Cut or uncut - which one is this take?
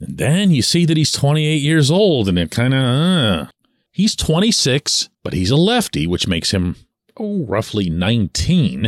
cut